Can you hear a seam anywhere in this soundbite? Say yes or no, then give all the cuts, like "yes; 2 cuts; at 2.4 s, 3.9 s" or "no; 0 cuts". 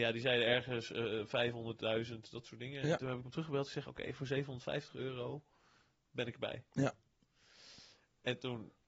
no; 0 cuts